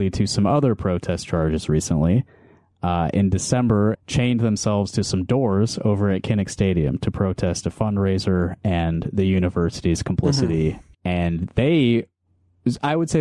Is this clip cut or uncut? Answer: cut